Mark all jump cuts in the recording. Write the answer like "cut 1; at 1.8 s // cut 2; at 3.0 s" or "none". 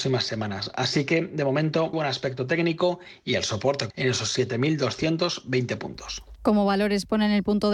cut 1; at 1.9 s // cut 2; at 3.9 s